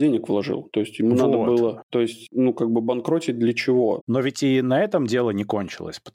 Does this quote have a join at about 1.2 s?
no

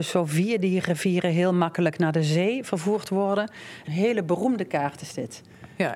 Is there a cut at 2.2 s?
no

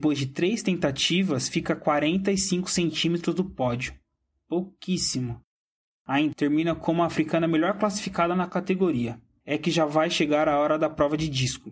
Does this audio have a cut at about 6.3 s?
yes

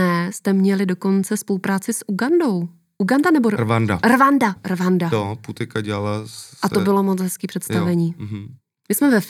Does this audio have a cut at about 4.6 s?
yes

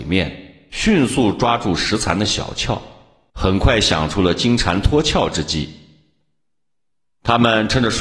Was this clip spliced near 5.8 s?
no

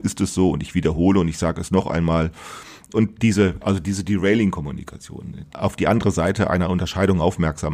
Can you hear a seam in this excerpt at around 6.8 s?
no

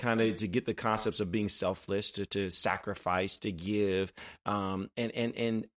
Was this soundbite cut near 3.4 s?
no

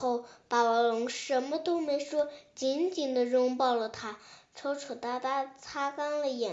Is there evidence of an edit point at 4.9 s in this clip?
no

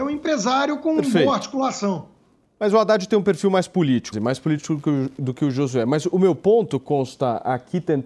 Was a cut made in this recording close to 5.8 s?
no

